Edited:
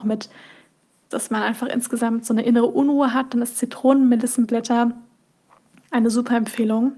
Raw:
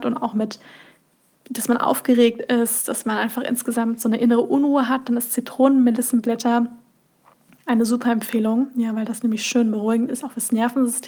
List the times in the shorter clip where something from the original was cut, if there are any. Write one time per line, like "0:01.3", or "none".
0:01.1